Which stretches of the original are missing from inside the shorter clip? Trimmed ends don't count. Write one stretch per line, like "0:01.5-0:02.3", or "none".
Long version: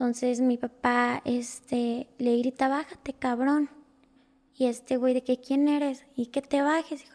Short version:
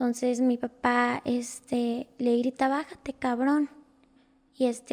none